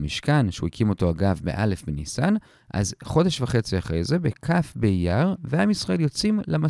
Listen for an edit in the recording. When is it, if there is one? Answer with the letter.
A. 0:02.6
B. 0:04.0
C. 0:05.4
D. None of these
C